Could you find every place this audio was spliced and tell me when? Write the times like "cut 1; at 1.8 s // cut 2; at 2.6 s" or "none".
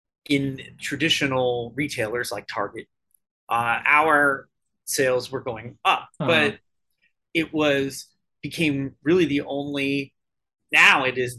cut 1; at 6.2 s